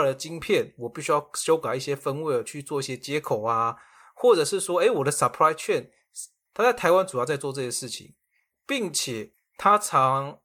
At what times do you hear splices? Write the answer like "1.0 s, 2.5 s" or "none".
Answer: 6.5 s